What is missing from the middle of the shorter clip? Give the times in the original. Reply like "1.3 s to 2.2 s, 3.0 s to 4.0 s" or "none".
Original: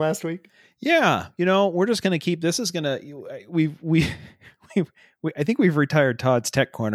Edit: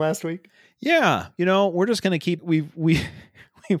2.4 s to 3.4 s

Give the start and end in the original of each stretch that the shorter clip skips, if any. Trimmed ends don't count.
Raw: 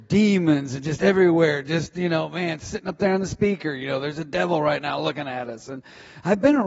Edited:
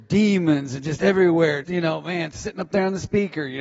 1.6 s to 1.9 s

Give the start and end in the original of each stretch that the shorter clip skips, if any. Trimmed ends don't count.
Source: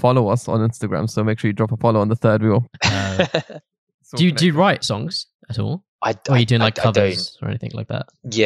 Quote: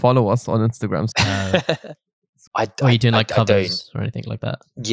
1.1 s to 2.8 s, 4.1 s to 5.9 s

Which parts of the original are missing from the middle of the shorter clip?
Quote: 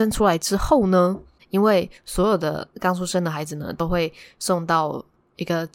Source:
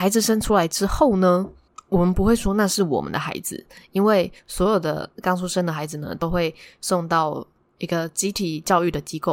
1.7 s to 3.8 s

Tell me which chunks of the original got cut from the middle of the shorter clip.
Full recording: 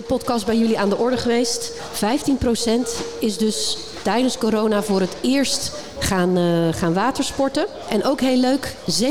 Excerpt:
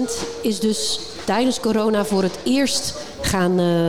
none

